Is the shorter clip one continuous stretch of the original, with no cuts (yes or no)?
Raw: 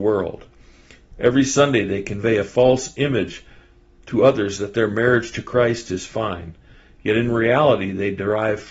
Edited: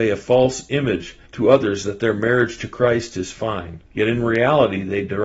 no